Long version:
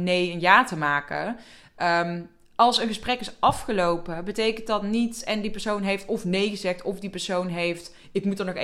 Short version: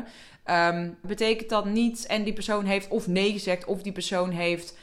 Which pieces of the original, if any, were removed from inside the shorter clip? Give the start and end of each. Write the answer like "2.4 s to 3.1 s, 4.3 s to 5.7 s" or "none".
2.4 s to 4.2 s